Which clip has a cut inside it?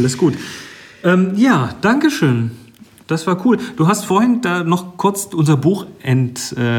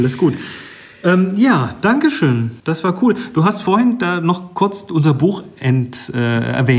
second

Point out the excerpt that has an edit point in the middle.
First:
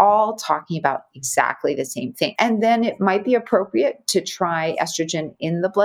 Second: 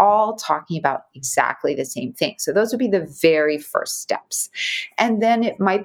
first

